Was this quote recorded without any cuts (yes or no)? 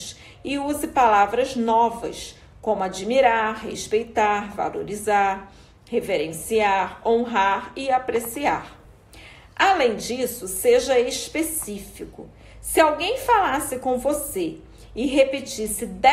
yes